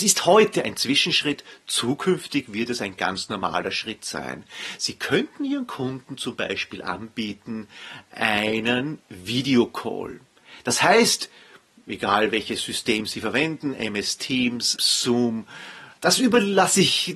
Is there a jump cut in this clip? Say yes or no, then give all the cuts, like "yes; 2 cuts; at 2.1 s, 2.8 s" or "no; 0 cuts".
yes; 2 cuts; at 14.8 s, 16.0 s